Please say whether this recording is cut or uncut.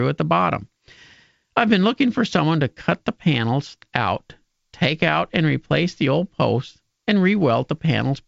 uncut